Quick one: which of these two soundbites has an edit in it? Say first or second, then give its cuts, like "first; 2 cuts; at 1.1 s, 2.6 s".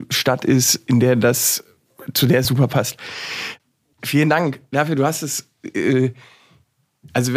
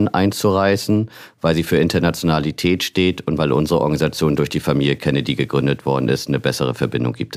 first; 2 cuts; at 2.4 s, 3.9 s